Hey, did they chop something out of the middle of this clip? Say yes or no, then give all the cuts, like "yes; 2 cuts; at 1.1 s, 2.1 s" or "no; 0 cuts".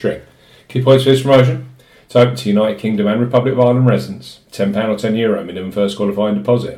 no; 0 cuts